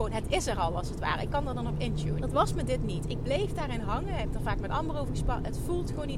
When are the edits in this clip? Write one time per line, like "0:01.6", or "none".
0:02.2